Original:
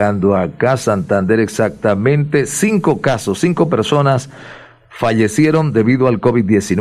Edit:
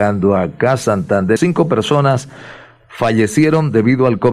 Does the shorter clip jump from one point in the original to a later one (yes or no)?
yes